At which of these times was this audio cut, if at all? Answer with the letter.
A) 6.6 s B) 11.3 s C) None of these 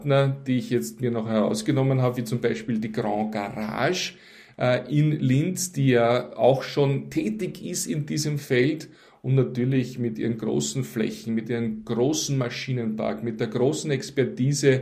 C